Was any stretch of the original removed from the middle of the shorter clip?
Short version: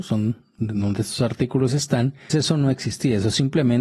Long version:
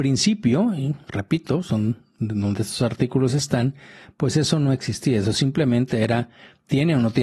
yes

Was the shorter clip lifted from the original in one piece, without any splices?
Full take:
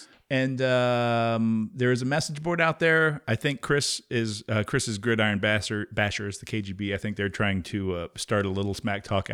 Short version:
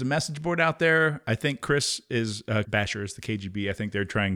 no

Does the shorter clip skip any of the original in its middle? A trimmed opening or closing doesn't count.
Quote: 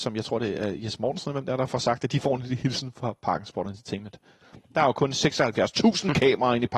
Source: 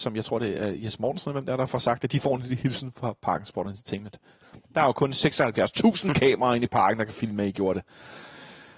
no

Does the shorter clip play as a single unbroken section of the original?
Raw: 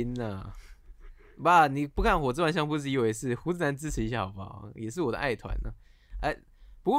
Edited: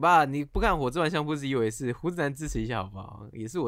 yes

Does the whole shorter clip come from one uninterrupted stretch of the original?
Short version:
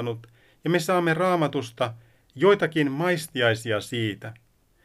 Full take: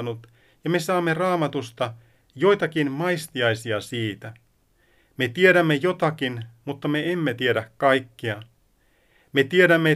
yes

